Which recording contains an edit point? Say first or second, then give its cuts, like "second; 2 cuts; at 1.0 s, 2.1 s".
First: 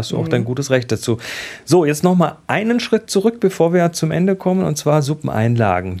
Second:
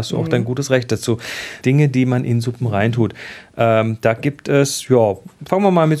second; 1 cut; at 1.6 s